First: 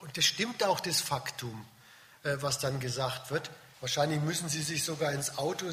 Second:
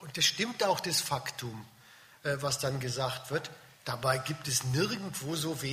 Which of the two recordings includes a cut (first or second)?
first